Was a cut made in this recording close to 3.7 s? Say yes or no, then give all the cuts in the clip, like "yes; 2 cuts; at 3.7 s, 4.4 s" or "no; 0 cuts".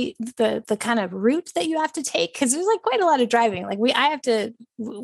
no; 0 cuts